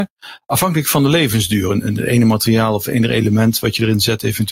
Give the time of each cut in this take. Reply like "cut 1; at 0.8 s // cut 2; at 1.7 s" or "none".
none